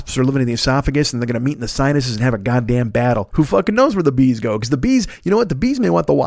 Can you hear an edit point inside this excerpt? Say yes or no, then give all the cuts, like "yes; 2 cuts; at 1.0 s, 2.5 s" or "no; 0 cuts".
yes; 1 cut; at 3.3 s